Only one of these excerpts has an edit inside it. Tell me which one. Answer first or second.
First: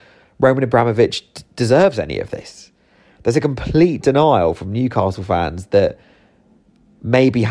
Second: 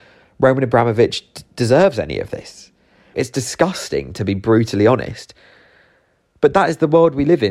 second